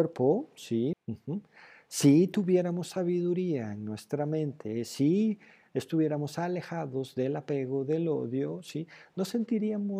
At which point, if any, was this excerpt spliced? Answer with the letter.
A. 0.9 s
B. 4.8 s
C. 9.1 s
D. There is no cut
A